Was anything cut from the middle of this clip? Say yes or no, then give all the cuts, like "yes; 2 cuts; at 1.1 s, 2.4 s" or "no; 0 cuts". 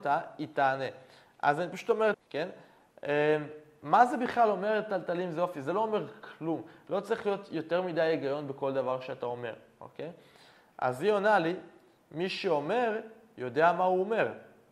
yes; 1 cut; at 2.1 s